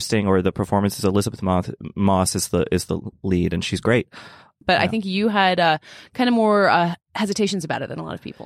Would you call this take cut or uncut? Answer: cut